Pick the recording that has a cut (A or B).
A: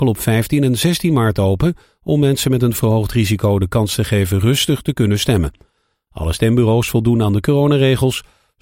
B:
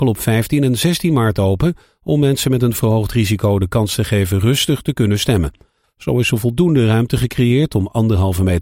B